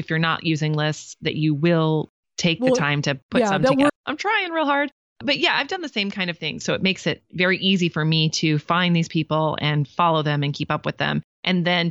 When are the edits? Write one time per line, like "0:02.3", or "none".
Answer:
0:03.9
0:06.6